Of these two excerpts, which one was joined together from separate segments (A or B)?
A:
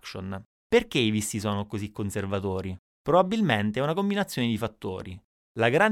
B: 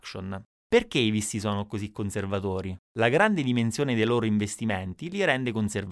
B